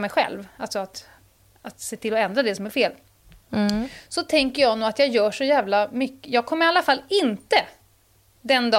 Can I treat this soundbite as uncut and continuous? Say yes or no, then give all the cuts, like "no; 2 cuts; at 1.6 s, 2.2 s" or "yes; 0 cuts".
yes; 0 cuts